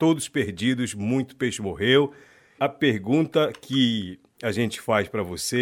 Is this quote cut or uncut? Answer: cut